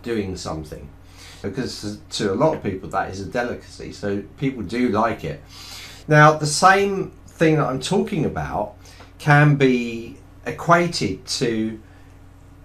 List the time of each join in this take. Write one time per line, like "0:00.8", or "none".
0:01.4
0:06.0